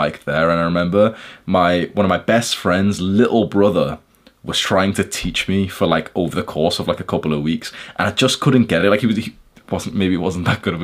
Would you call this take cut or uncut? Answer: uncut